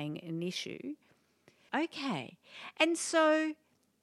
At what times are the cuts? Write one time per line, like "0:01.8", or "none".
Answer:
0:01.7